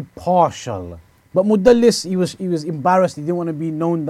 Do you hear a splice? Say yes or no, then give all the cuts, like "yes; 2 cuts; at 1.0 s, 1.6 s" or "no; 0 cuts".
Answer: yes; 1 cut; at 1.2 s